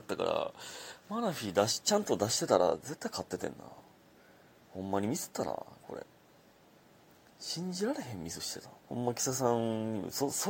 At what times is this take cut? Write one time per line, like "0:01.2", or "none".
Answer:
0:08.8